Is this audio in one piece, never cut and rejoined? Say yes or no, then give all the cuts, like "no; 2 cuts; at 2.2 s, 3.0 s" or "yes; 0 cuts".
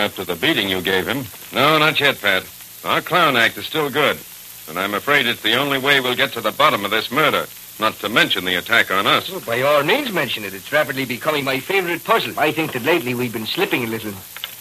no; 2 cuts; at 1.5 s, 12.3 s